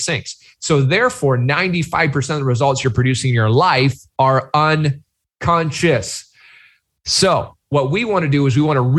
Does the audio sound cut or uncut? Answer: cut